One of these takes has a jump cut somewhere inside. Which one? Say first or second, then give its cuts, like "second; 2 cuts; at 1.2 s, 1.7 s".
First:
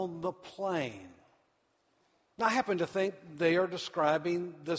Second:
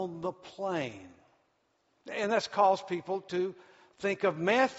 second; 1 cut; at 2.0 s